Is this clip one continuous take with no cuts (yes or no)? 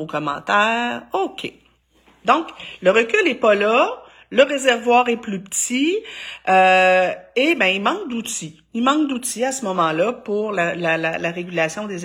yes